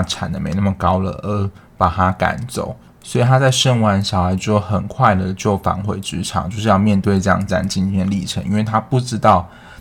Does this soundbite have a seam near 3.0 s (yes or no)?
yes